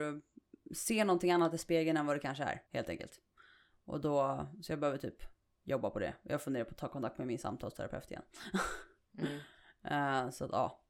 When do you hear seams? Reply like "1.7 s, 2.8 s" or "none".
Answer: 2.7 s